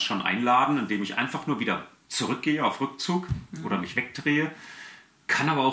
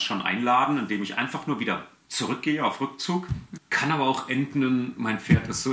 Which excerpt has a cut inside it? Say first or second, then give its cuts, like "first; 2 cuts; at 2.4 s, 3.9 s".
second; 1 cut; at 3.6 s